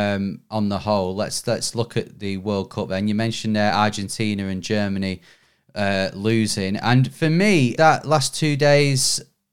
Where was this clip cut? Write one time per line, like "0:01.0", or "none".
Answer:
0:07.8